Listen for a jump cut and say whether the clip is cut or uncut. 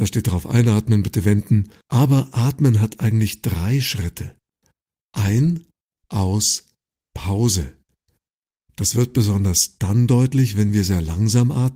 cut